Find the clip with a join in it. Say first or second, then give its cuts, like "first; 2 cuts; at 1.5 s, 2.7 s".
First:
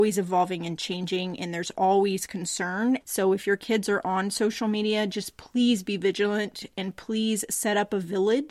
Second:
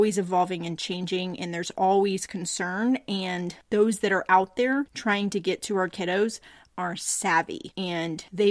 first; 1 cut; at 3.0 s